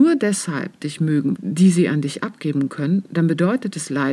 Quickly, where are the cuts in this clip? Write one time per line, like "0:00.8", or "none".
0:01.3